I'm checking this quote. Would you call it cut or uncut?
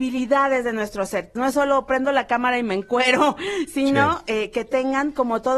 cut